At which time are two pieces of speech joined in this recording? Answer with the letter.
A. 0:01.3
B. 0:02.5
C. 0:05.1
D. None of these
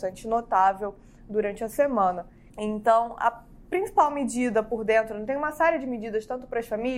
B